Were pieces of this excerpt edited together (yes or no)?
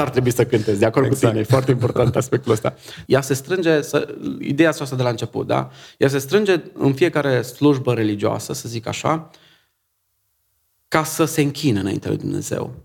yes